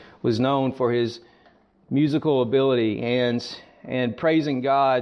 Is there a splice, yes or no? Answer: no